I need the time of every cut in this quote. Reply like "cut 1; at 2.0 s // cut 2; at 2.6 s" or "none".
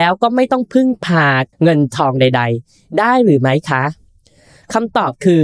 cut 1; at 1.5 s